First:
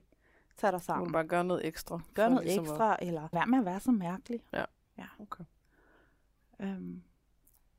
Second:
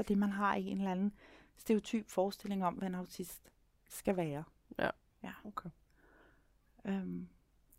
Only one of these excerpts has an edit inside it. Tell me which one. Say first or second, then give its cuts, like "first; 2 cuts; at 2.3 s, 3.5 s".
first; 2 cuts; at 3.3 s, 4.5 s